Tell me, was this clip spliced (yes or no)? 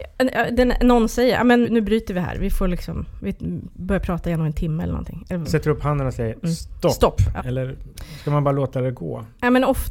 yes